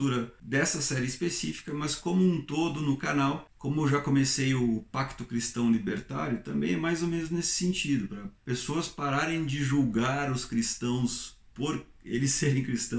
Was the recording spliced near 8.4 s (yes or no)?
yes